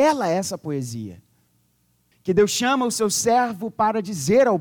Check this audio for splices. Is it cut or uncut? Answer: cut